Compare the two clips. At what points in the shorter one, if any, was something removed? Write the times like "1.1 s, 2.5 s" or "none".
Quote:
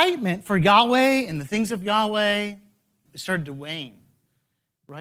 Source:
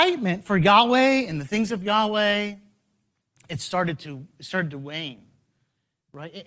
3.0 s